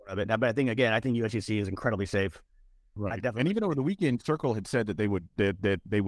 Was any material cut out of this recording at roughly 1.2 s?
no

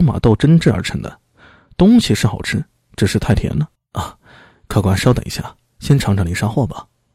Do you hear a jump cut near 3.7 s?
yes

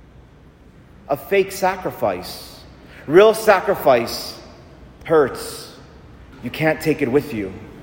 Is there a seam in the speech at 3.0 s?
no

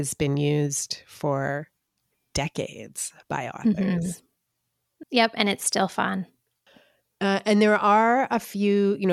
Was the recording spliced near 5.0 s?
yes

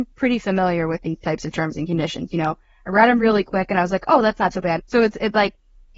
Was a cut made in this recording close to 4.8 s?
yes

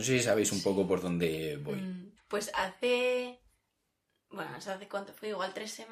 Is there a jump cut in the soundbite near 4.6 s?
no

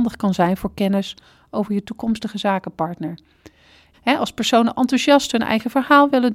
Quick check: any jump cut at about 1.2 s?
no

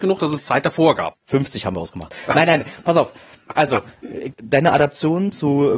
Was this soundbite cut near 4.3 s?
yes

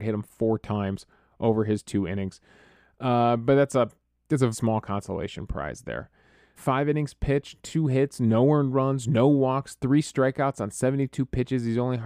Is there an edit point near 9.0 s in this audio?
no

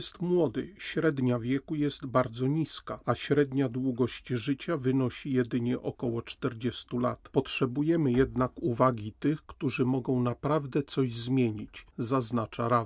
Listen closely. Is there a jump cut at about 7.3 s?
yes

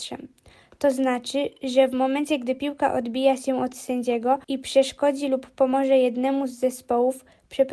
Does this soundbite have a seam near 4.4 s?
yes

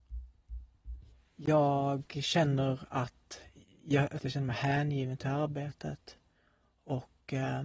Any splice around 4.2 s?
yes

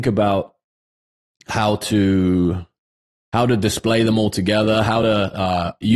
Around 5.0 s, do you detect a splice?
no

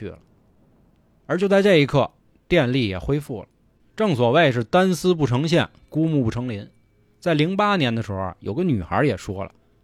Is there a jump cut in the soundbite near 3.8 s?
yes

